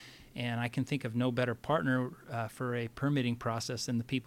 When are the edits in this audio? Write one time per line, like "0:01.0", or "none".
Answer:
none